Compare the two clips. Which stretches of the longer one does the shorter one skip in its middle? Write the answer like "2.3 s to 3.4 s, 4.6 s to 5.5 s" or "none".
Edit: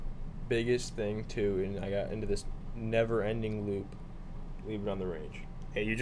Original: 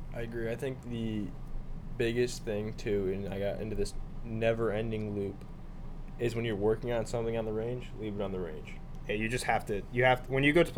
6.1 s to 8.0 s